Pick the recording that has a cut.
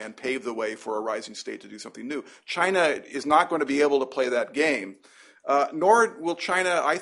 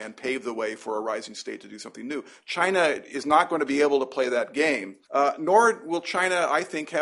second; 1 cut; at 5.0 s

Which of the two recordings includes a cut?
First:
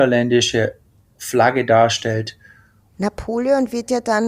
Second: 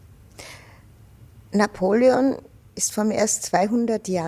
first; 1 cut; at 2.9 s

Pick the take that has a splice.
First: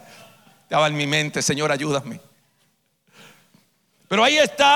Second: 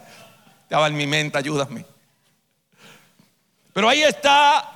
second; 1 cut; at 1.3 s

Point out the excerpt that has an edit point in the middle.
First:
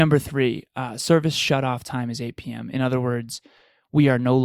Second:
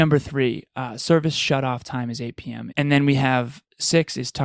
second; 1 cut; at 2.7 s

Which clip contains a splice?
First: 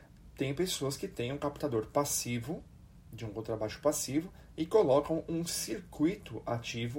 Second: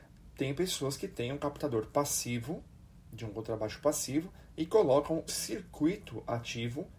second; 1 cut; at 5.3 s

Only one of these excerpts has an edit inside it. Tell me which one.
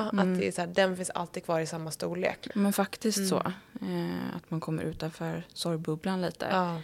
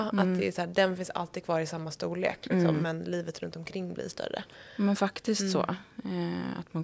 first; 1 cut; at 2.5 s

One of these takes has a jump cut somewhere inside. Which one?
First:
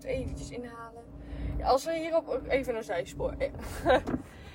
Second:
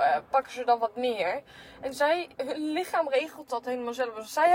first; 1 cut; at 3.5 s

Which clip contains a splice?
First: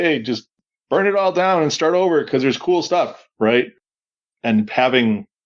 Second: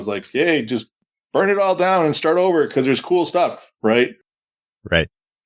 first; 1 cut; at 4.3 s

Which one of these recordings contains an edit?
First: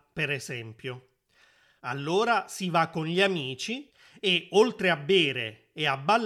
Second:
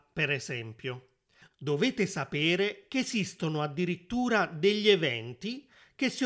second; 1 cut; at 1.4 s

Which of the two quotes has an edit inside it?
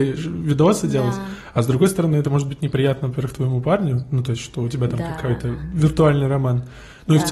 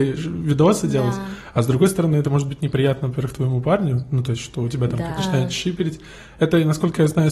second; 1 cut; at 5.2 s

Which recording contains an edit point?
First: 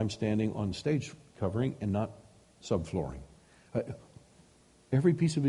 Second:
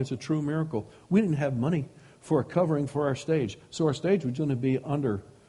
second; 1 cut; at 4.3 s

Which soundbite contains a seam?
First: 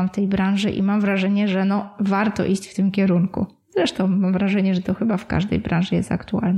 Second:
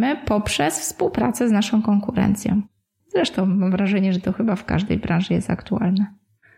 second; 1 cut; at 3.0 s

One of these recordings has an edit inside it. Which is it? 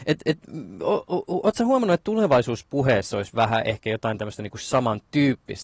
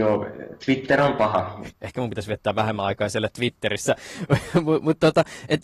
second; 1 cut; at 1.7 s

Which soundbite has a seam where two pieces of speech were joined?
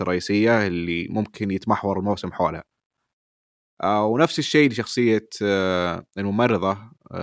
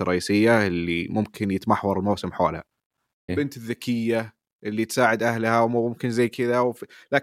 second; 1 cut; at 3.3 s

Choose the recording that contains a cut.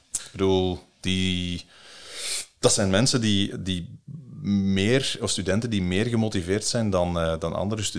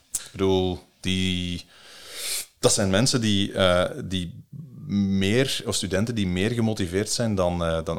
first; 1 cut; at 3.5 s

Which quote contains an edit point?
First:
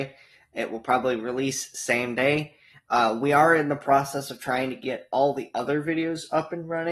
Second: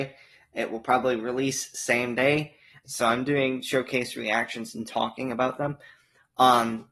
second; 1 cut; at 2.8 s

